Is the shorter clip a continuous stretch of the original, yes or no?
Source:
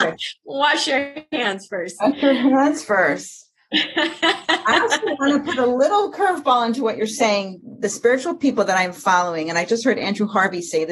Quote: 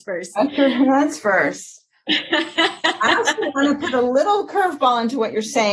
yes